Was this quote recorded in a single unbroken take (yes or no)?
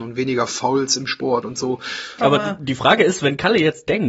no